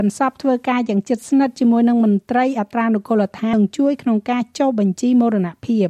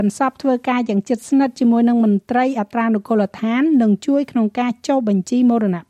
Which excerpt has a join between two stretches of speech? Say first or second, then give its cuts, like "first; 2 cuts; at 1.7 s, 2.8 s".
first; 1 cut; at 3.5 s